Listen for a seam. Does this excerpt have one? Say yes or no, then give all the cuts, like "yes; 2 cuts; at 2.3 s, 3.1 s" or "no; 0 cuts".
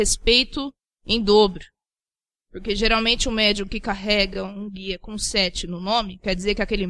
no; 0 cuts